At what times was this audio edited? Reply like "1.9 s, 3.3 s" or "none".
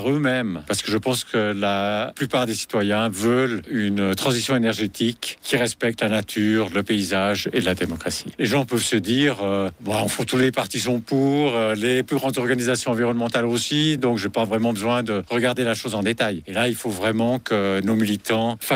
none